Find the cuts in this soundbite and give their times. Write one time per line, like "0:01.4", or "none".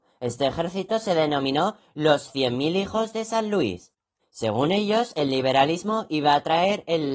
0:04.2